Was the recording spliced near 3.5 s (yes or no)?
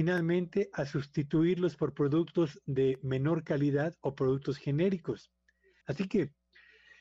no